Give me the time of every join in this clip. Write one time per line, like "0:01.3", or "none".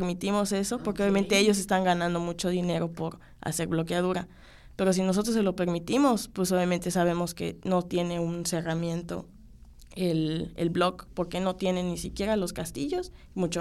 none